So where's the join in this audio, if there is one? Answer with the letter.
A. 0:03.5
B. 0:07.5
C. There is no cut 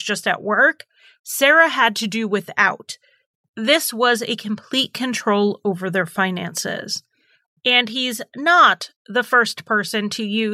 B